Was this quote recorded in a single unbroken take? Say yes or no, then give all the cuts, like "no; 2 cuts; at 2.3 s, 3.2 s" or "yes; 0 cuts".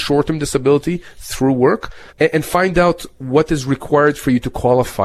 no; 1 cut; at 2.1 s